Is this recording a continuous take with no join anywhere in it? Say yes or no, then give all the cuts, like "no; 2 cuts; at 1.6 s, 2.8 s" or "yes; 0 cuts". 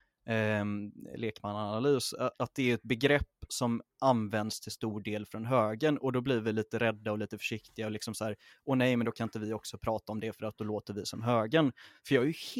no; 1 cut; at 2.3 s